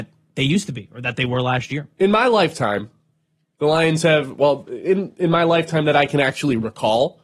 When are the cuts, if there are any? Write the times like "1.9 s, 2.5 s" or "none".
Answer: none